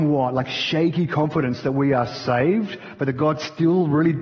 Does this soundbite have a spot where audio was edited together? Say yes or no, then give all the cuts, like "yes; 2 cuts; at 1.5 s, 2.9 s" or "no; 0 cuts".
no; 0 cuts